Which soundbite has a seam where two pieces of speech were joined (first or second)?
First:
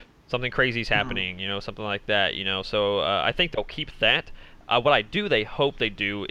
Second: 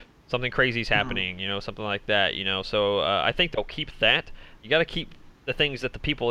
second